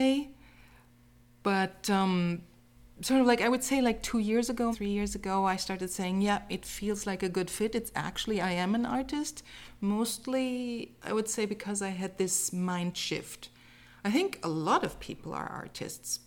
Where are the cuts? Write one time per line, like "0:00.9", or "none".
0:04.7